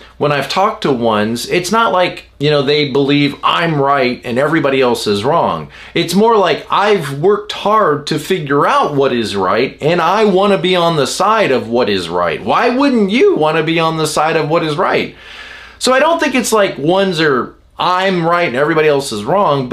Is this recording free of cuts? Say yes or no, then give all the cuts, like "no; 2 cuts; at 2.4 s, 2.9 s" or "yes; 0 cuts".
yes; 0 cuts